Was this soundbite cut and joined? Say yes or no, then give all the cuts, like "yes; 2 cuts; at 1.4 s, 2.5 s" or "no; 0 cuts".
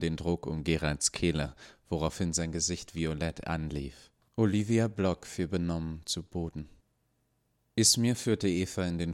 yes; 1 cut; at 4.3 s